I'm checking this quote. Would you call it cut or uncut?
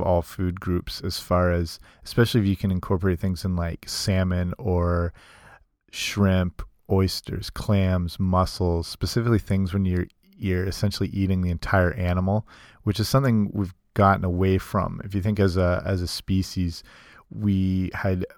uncut